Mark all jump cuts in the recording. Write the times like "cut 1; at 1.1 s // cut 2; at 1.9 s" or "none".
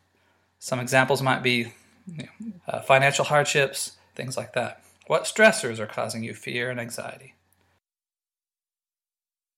cut 1; at 2.6 s // cut 2; at 4.1 s